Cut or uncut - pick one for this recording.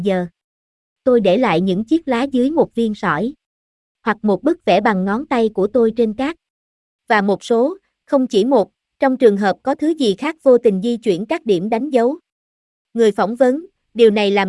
uncut